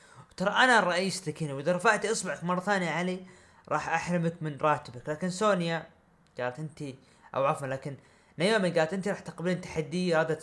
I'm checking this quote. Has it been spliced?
no; 0 cuts

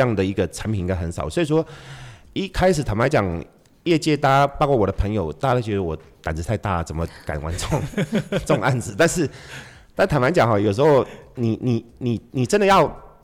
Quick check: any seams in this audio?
no; 0 cuts

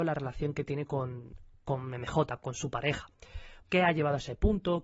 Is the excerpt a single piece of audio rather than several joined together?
no; 1 cut; at 3.6 s

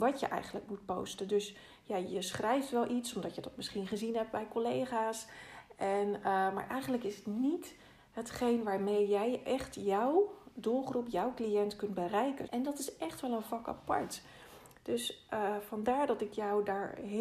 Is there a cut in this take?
yes; 1 cut; at 12.5 s

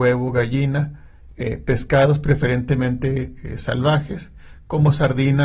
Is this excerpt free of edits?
yes; 0 cuts

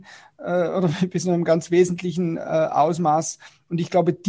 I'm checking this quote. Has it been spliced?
no; 0 cuts

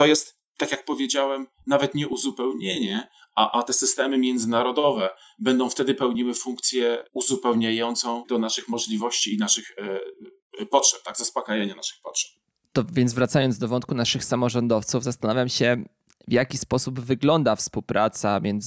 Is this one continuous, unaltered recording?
yes; 0 cuts

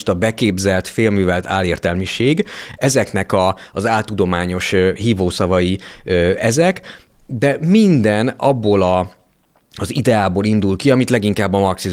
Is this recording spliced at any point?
no; 0 cuts

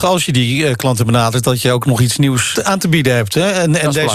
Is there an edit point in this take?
yes; 1 cut; at 2.5 s

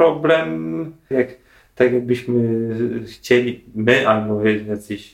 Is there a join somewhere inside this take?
yes; 1 cut; at 1.1 s

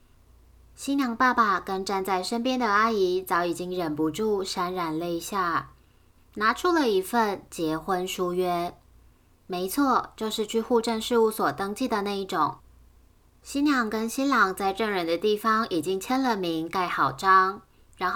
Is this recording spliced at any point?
yes; 1 cut; at 6.2 s

